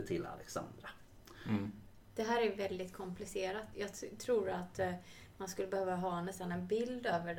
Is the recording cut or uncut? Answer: uncut